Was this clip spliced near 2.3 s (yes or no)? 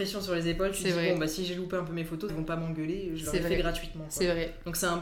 yes